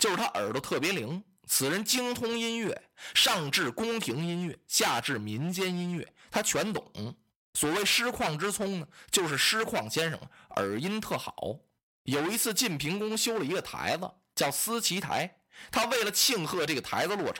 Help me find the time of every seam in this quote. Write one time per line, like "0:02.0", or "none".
none